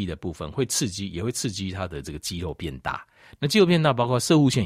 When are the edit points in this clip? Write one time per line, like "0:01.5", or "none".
none